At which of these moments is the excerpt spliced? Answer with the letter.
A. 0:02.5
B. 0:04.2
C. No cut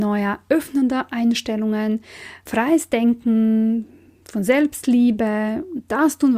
A